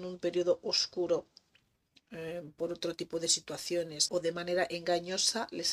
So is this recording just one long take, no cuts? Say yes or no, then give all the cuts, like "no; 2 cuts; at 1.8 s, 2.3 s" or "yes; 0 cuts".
no; 1 cut; at 4.1 s